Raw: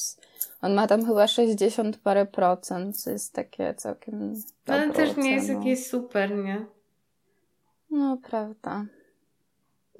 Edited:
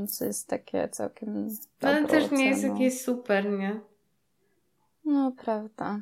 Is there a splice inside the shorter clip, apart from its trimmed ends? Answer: no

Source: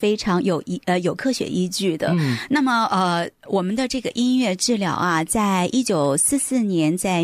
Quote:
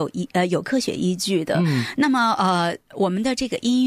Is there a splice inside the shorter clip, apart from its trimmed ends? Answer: no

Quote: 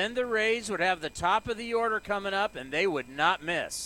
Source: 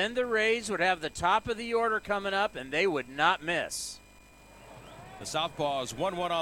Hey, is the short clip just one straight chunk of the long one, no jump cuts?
yes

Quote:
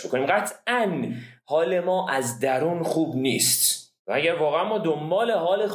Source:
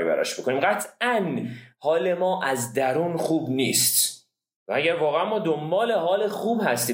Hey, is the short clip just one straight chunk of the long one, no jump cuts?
no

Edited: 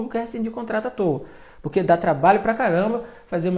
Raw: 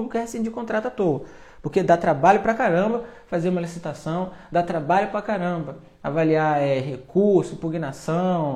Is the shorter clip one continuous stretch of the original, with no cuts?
yes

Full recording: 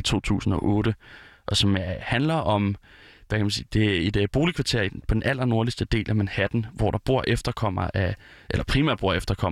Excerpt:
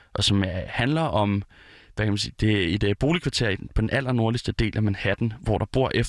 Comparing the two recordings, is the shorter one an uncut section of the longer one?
yes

